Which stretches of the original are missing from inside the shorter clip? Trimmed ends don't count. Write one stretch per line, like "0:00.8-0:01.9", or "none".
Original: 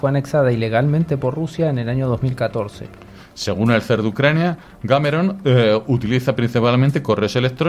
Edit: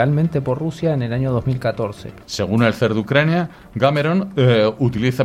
0:03.0-0:03.3